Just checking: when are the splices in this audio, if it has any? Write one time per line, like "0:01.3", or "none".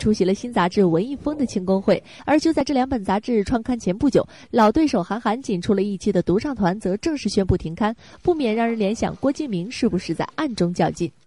0:02.2